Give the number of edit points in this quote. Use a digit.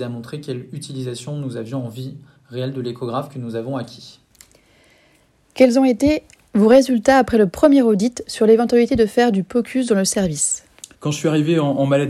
1